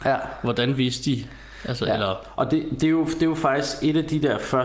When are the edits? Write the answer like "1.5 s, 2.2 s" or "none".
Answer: none